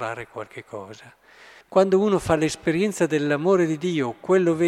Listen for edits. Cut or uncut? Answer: cut